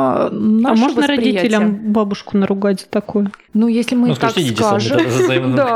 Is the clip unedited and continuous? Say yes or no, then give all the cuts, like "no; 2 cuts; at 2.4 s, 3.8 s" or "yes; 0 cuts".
no; 1 cut; at 3.5 s